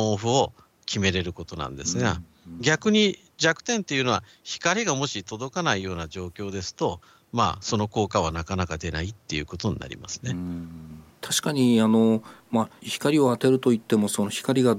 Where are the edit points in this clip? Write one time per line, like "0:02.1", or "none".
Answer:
none